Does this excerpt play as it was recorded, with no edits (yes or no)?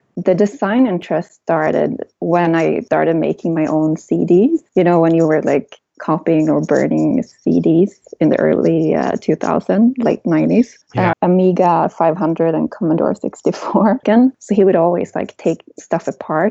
no